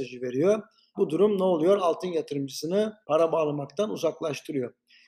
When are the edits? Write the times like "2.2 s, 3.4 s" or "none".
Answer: 0.9 s, 3.0 s

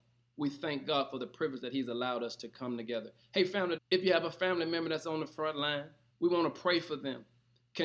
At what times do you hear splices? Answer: 3.8 s, 6.1 s

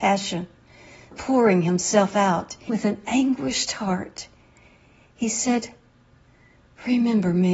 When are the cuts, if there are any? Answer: 1.1 s, 2.7 s

